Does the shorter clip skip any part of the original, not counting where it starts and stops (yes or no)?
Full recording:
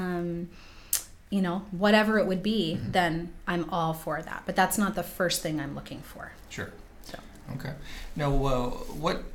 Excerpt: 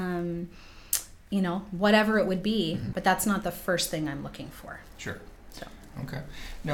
yes